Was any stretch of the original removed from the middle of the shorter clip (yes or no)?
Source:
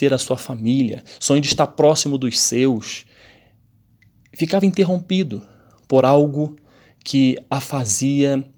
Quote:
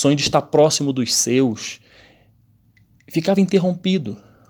no